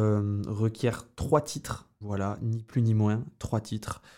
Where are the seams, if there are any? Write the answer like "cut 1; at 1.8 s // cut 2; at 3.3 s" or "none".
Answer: cut 1; at 2.0 s